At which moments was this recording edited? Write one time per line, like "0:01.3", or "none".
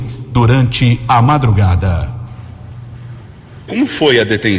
0:03.7